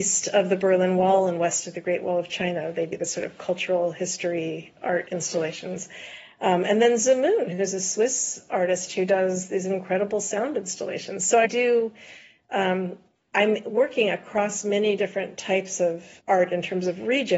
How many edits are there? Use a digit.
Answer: 2